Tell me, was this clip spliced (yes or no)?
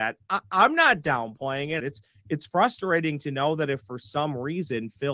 yes